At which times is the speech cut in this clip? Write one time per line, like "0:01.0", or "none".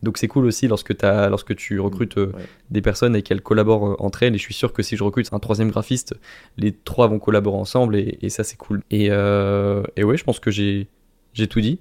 0:05.3
0:08.8